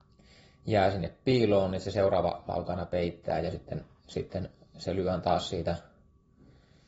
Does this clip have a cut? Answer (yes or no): no